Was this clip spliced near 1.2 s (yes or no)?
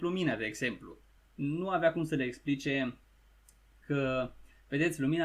yes